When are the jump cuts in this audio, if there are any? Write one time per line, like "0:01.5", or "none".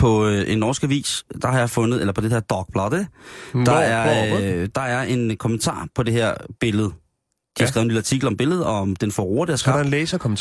none